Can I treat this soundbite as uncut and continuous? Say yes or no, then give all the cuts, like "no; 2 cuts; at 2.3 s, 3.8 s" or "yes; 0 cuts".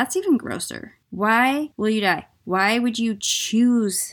no; 1 cut; at 1.0 s